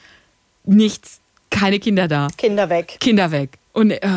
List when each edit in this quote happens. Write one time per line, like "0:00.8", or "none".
none